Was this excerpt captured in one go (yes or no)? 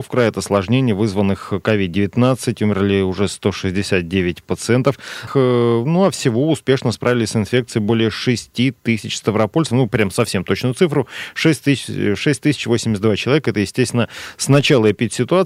no